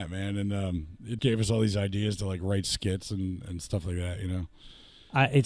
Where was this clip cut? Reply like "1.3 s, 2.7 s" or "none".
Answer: 1.2 s